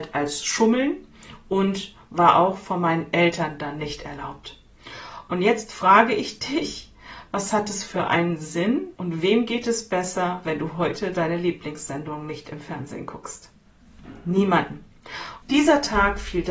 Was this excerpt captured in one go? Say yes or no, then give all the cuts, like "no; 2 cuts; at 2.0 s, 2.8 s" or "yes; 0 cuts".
no; 2 cuts; at 8.9 s, 15.4 s